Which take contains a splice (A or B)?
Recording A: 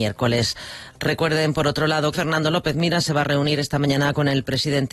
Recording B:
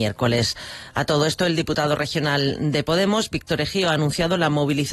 A